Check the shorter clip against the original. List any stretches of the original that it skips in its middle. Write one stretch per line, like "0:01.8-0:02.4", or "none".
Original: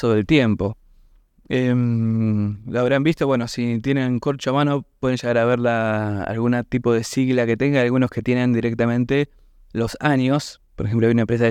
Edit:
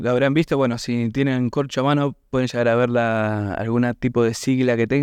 none